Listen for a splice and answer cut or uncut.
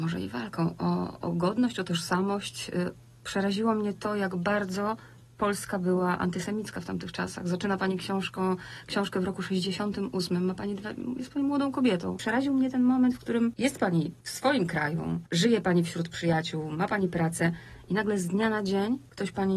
uncut